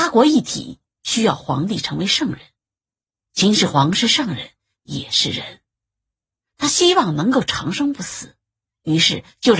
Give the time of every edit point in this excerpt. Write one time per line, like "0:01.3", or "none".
none